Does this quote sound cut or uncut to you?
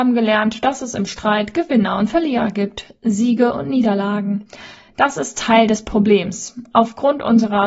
uncut